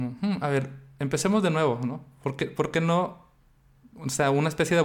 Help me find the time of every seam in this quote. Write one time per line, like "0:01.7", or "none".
none